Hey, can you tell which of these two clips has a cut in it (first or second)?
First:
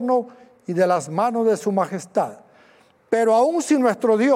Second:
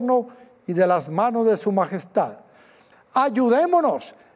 second